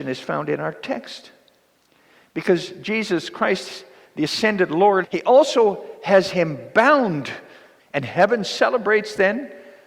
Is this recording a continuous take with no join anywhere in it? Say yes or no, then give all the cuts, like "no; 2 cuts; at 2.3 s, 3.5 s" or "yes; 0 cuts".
no; 2 cuts; at 5.0 s, 7.8 s